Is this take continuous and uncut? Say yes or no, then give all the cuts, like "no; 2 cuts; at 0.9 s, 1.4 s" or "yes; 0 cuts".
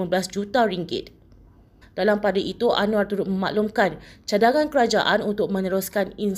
no; 1 cut; at 1.8 s